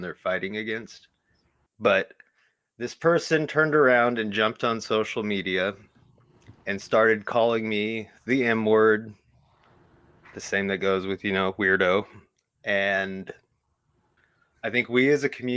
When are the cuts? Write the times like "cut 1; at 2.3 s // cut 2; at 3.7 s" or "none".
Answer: cut 1; at 1.7 s // cut 2; at 6.6 s